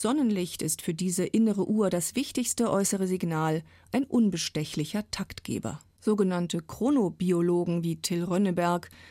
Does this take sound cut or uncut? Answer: cut